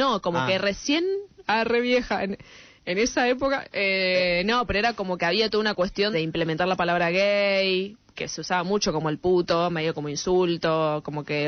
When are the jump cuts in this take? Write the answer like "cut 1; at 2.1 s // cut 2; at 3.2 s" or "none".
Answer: cut 1; at 6.1 s